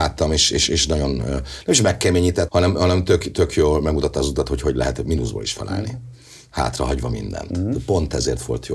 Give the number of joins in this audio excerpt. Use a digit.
1